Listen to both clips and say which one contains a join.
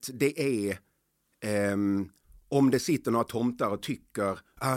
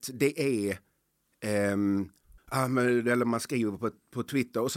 second; 1 cut; at 2.4 s

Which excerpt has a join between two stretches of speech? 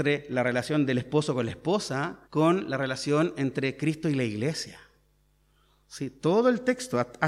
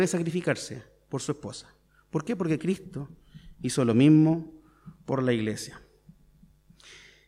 first; 1 cut; at 2.2 s

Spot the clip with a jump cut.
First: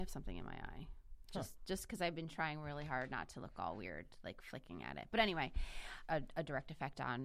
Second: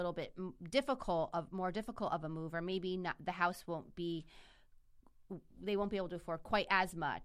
first; 1 cut; at 6.1 s

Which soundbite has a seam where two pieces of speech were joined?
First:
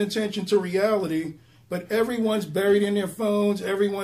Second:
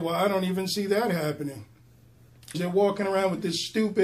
second; 1 cut; at 2.5 s

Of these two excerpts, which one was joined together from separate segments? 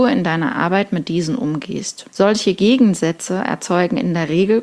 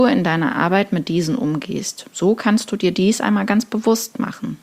first; 1 cut; at 2.1 s

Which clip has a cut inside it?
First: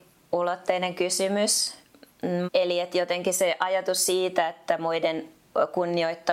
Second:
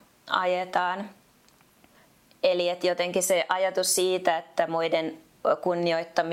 first; 1 cut; at 2.4 s

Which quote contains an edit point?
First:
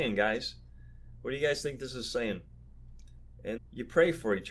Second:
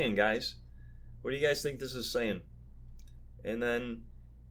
first; 1 cut; at 3.6 s

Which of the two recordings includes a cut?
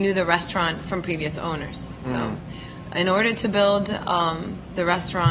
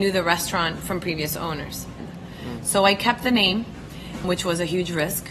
second; 2 cuts; at 2.0 s, 4.2 s

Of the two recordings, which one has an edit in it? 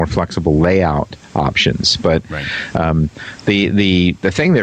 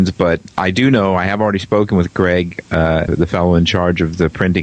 second; 1 cut; at 3.1 s

